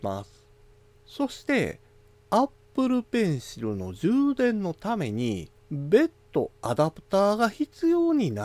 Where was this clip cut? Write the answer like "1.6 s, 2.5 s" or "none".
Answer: 0.9 s, 5.6 s

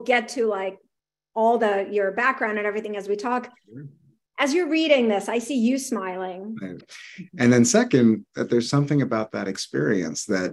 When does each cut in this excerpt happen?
6.8 s

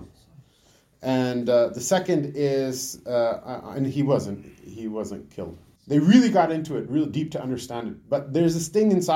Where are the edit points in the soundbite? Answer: 5.7 s

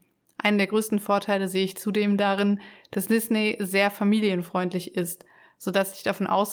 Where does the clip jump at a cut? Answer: none

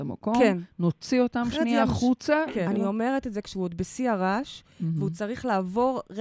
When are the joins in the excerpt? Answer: 2.7 s

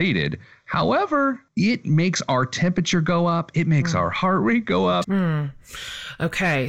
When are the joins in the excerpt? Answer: 1.5 s, 5.0 s

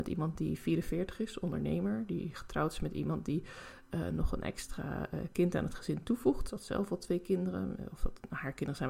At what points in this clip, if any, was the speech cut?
none

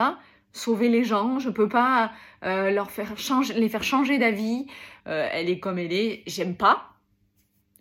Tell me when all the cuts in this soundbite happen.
5.0 s

